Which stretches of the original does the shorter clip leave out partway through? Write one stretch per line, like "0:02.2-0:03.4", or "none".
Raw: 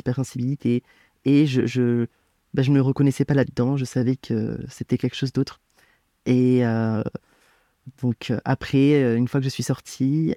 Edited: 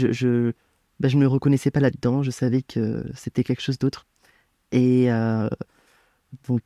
none